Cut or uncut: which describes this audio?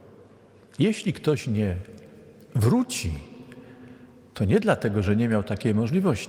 uncut